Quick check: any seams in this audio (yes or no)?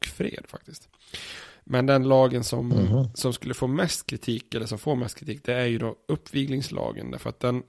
no